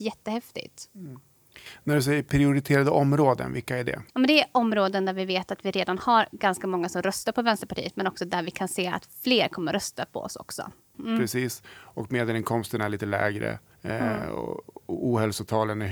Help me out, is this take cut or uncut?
cut